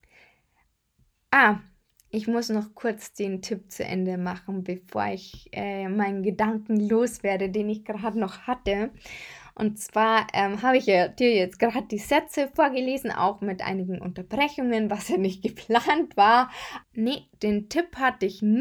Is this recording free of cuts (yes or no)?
no